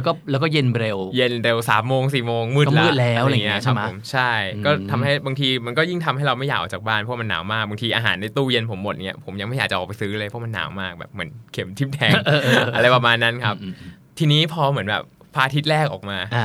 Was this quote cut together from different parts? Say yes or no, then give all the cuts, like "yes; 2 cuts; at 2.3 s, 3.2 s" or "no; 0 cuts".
yes; 1 cut; at 11.5 s